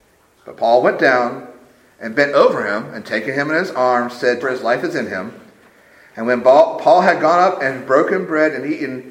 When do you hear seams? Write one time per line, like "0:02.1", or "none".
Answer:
0:04.4